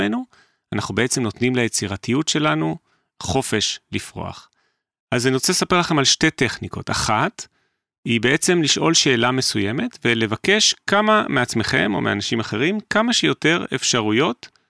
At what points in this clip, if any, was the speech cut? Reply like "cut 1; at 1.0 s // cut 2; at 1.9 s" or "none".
cut 1; at 4.9 s